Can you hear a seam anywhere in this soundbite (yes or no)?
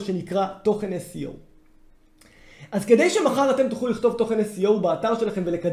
no